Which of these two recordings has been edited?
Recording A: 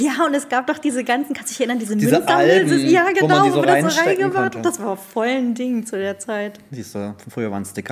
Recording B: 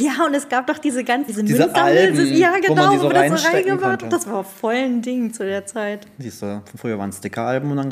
B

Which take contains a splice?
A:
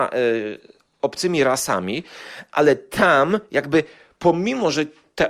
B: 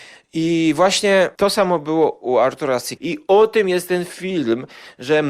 B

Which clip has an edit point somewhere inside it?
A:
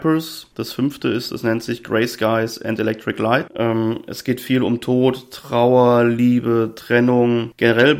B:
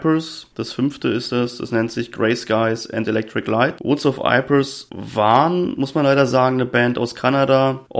A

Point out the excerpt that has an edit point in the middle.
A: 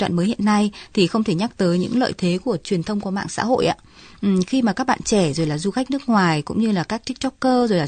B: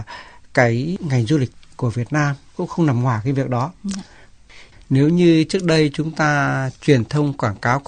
B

